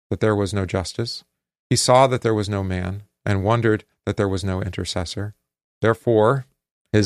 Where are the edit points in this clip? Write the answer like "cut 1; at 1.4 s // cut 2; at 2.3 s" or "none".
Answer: none